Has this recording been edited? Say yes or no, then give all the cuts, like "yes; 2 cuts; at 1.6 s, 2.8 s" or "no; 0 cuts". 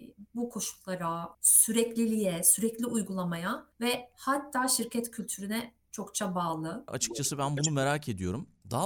yes; 2 cuts; at 1.3 s, 6.9 s